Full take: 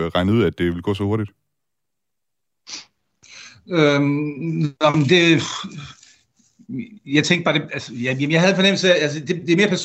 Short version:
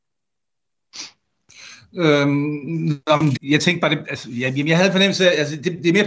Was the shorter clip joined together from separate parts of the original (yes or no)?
yes